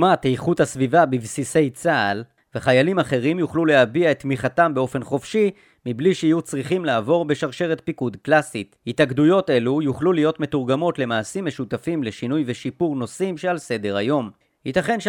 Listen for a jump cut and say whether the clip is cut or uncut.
uncut